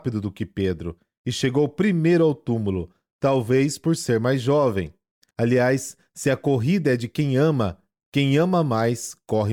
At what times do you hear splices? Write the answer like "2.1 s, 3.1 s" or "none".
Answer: 5.3 s

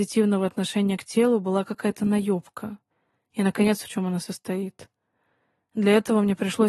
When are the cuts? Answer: 3.8 s

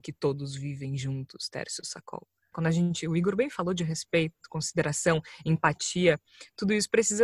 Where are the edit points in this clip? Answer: 2.5 s

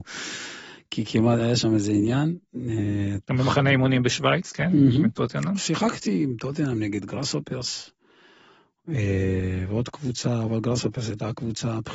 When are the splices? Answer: 3.2 s

